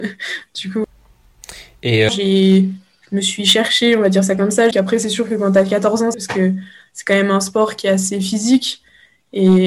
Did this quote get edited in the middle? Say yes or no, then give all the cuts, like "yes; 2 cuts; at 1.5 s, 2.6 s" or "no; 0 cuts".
yes; 3 cuts; at 2.1 s, 4.7 s, 6.1 s